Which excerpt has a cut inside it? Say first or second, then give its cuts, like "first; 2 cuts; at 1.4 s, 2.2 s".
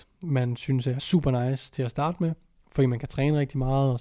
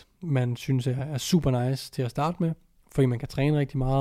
first; 1 cut; at 1.0 s